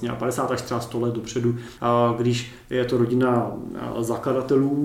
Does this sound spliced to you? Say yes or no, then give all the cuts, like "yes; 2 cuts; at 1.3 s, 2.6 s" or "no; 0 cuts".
yes; 1 cut; at 1.8 s